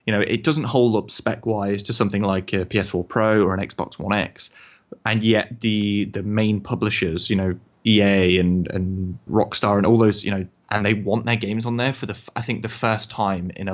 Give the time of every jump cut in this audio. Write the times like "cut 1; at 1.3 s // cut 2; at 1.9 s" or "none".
cut 1; at 9.3 s // cut 2; at 10.6 s